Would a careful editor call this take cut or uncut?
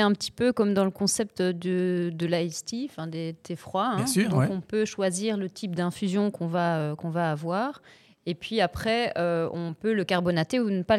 uncut